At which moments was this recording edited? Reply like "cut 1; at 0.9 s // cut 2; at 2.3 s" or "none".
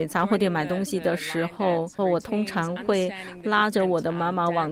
cut 1; at 2.0 s